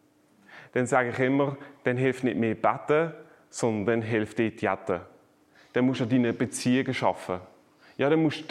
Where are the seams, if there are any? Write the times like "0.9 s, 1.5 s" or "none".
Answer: none

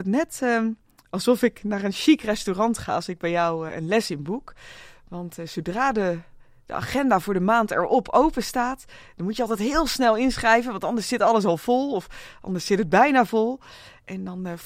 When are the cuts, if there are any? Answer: 3.7 s

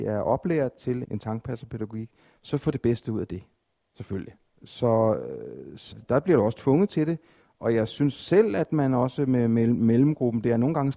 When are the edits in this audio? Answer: 1.0 s, 4.5 s, 5.9 s

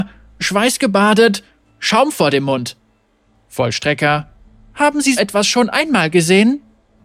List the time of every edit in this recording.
5.2 s

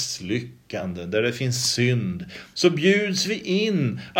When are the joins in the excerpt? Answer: 2.5 s

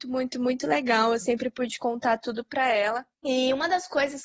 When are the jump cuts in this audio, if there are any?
3.1 s

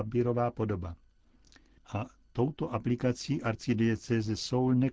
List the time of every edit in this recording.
1.8 s

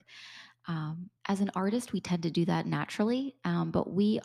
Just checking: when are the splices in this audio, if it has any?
1.2 s

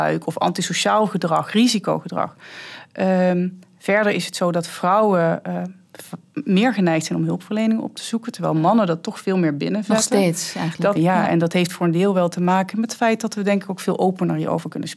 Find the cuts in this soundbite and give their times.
11.0 s

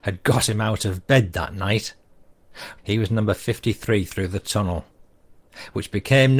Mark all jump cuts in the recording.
2.8 s

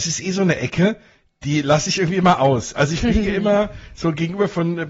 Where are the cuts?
none

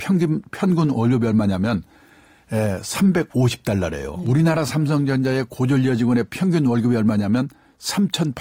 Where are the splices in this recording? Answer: none

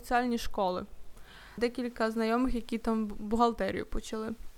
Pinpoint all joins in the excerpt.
1.6 s

